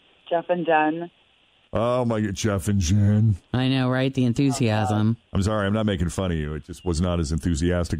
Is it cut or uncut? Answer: uncut